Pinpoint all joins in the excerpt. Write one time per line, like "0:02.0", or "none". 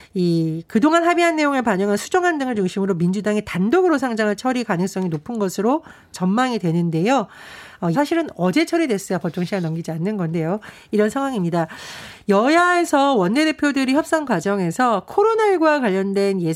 0:07.9